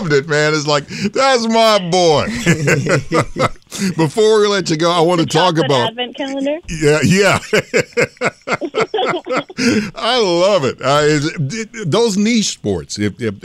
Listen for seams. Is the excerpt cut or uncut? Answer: uncut